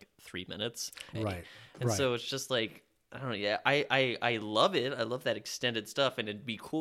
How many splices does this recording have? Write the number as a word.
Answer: one